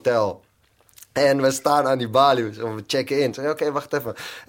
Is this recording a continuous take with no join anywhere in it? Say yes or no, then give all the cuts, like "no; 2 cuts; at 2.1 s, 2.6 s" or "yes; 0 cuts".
yes; 0 cuts